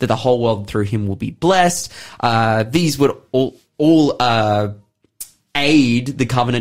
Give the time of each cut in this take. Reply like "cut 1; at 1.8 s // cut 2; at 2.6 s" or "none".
none